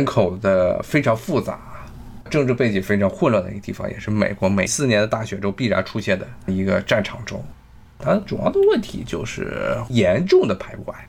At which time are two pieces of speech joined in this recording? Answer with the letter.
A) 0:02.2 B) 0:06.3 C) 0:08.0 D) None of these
C